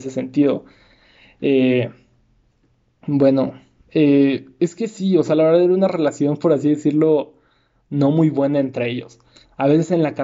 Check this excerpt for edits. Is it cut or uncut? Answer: uncut